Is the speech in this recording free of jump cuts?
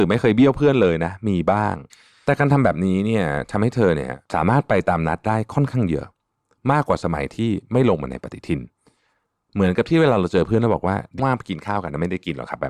no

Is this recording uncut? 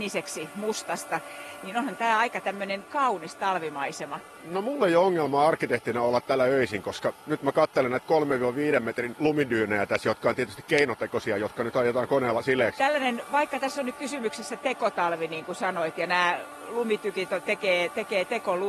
no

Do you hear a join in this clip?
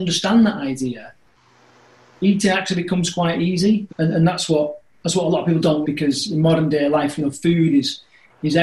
yes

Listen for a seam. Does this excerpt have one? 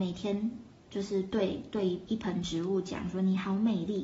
no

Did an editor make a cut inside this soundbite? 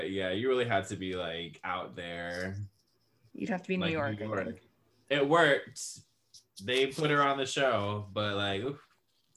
yes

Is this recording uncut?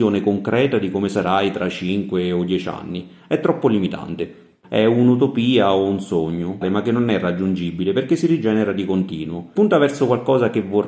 no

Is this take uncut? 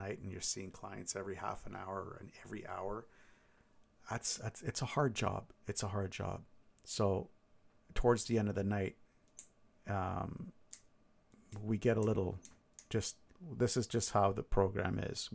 yes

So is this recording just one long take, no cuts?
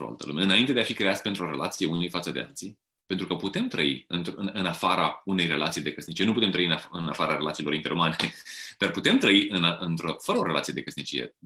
yes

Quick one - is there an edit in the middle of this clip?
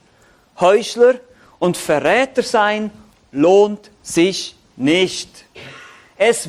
no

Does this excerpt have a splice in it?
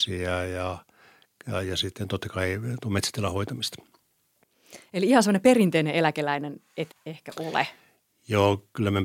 yes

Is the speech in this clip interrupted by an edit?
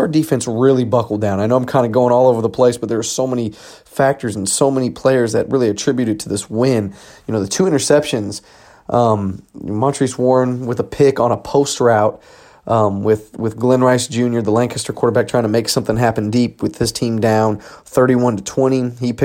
no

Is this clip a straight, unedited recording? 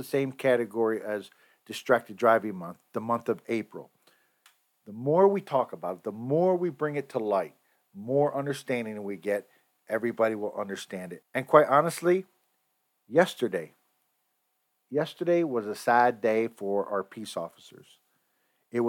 no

